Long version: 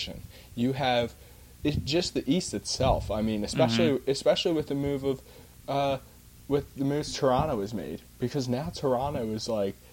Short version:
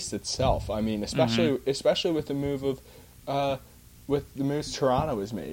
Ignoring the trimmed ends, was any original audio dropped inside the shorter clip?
no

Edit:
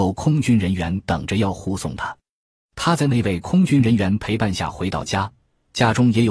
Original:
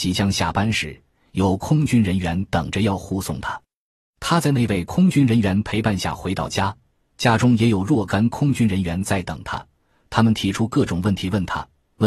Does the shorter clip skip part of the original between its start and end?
no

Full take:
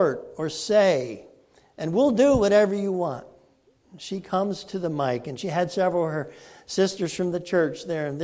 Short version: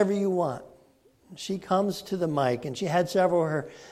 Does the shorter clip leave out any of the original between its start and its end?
no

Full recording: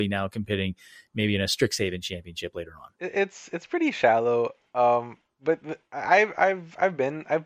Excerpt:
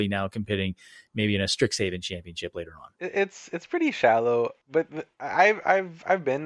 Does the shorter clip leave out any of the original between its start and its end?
yes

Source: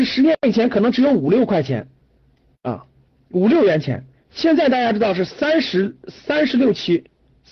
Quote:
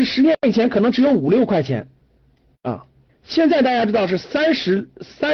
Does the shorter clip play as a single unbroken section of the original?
no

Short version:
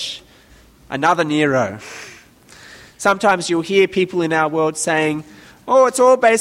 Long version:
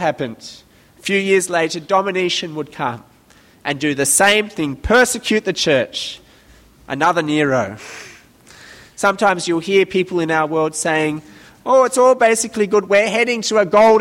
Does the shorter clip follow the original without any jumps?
yes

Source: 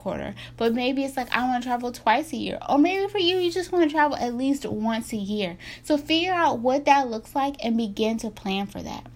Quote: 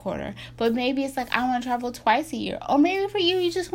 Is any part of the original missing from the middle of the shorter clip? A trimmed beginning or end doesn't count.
no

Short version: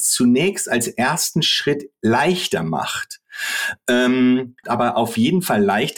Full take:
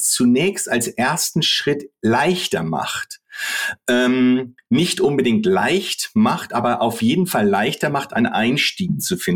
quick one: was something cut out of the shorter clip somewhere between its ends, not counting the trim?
yes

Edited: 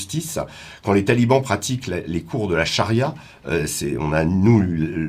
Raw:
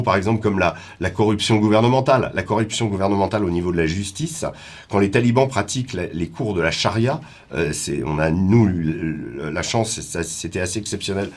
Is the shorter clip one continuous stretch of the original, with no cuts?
yes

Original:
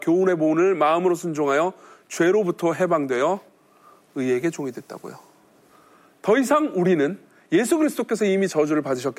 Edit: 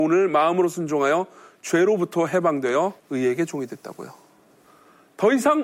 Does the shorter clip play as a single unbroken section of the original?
no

